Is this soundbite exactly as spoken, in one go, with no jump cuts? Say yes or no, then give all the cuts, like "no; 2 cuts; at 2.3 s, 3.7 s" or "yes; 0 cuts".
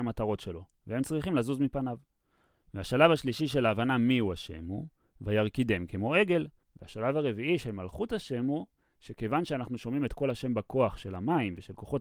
no; 2 cuts; at 2.6 s, 6.6 s